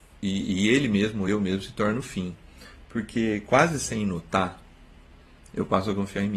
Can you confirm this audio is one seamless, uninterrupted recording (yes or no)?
yes